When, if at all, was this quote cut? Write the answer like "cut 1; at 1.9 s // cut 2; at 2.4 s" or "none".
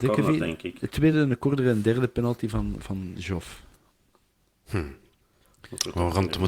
none